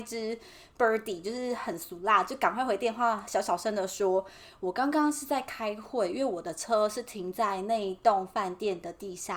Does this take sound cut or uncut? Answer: uncut